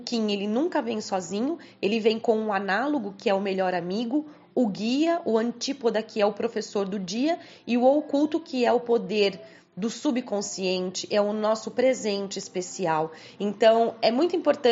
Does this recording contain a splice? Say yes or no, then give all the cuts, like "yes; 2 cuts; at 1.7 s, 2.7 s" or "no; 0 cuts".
yes; 1 cut; at 13.4 s